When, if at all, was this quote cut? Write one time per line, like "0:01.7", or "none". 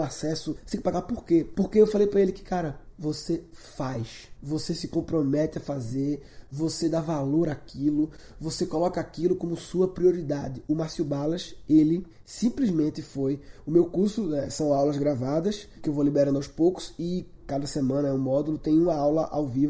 0:01.5
0:02.9